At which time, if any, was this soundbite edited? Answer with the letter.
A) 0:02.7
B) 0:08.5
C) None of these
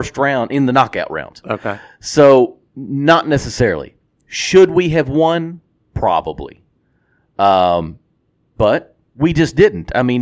A